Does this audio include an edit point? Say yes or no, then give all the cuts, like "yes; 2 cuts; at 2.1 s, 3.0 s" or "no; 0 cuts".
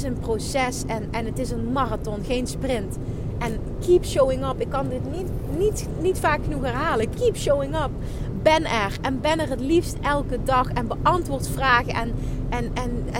no; 0 cuts